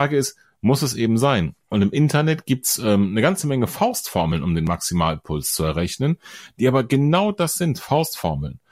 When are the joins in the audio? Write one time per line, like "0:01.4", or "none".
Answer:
0:01.6

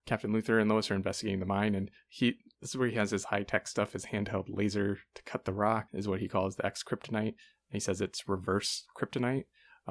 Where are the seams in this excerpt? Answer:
0:05.9

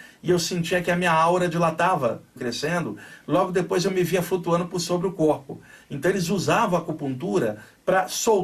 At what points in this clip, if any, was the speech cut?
0:02.4

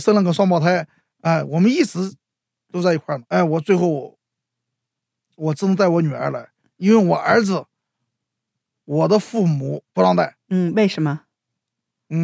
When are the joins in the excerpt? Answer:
0:09.9

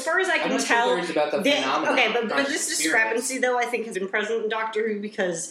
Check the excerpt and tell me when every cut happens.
0:02.3
0:03.9

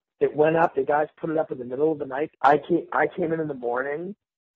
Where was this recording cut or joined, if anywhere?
0:02.3

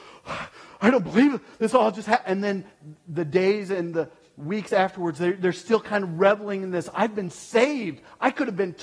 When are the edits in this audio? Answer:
none

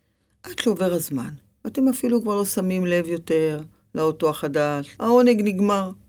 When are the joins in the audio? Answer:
0:05.0

